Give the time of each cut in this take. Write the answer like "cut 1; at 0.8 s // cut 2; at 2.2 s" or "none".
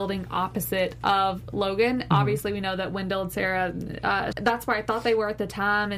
cut 1; at 4.3 s